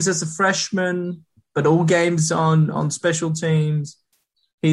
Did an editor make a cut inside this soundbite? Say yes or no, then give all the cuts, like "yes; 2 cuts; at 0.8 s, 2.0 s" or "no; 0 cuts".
no; 0 cuts